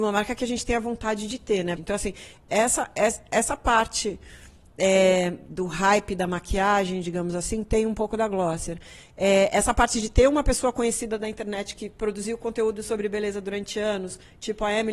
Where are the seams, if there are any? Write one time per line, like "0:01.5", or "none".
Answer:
0:01.8

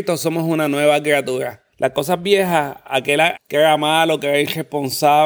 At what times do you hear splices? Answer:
0:01.7
0:03.3

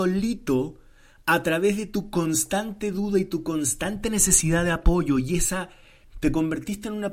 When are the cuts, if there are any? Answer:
0:06.0

